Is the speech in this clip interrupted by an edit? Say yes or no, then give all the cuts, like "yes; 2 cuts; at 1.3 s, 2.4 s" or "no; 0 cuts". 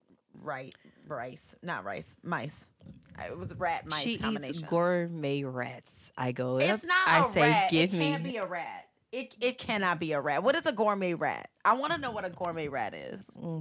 no; 0 cuts